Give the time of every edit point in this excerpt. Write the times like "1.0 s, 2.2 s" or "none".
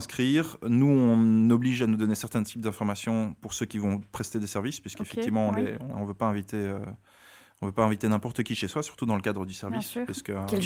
5.9 s